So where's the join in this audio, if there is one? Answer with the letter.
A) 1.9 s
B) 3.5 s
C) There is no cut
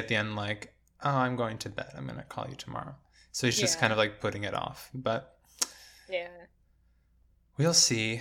C